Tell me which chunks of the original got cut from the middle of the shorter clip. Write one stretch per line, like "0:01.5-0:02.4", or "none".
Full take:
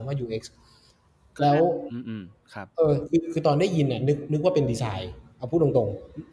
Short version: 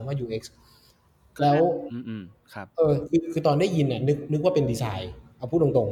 none